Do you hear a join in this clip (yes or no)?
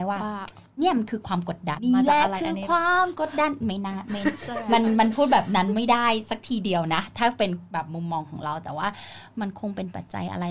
yes